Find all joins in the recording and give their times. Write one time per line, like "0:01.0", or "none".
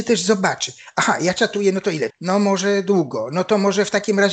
0:02.1